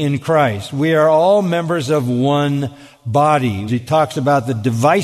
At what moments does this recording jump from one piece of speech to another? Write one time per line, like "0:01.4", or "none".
0:03.7